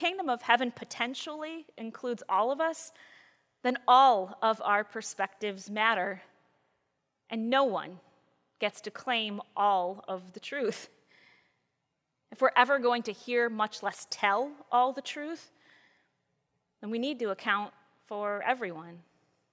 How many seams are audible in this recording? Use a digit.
0